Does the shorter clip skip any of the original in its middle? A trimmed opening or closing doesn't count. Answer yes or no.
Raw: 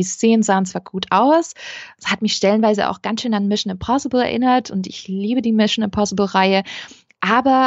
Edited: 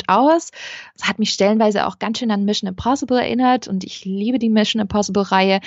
no